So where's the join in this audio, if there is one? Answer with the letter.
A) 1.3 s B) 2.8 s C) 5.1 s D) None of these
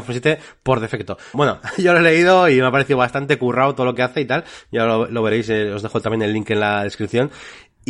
A